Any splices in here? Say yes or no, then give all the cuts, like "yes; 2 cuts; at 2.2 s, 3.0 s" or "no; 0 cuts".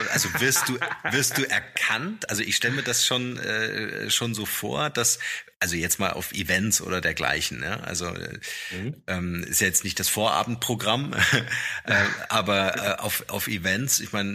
no; 0 cuts